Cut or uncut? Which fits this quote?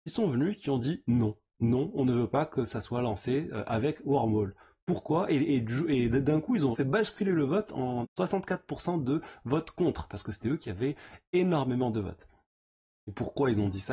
cut